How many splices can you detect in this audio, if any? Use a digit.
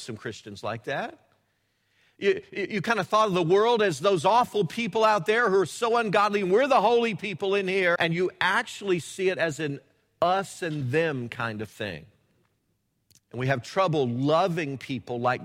2